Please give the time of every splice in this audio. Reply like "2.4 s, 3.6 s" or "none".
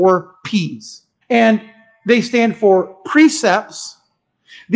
1.2 s